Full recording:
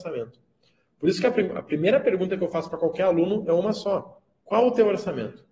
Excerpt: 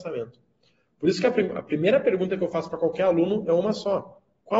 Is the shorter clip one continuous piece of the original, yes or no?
yes